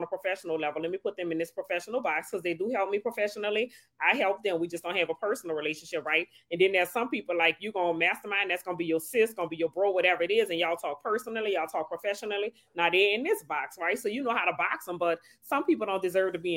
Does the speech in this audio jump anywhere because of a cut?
no; 0 cuts

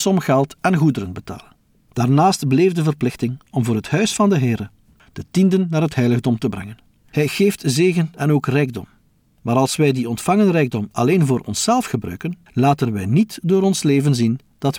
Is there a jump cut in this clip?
yes; 2 cuts; at 5.0 s, 7.0 s

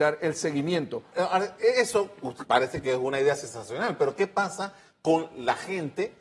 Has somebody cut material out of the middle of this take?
yes; 2 cuts; at 1.1 s, 2.5 s

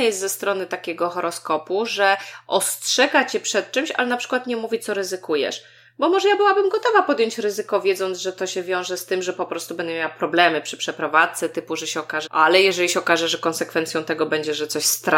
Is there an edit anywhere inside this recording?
yes; 1 cut; at 12.3 s

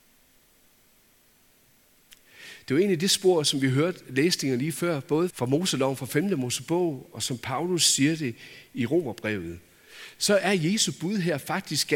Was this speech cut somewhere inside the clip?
yes; 1 cut; at 5.3 s

